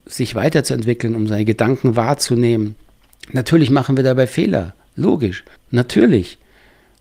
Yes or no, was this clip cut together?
yes